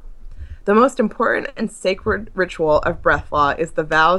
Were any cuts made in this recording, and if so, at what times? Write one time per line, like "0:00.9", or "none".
none